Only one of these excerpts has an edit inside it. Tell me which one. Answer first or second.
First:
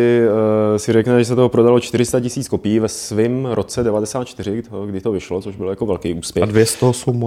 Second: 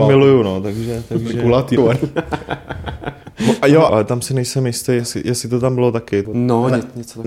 second